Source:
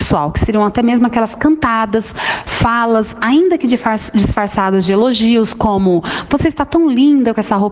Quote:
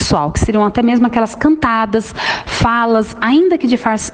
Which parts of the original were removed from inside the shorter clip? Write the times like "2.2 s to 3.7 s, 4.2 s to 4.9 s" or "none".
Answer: none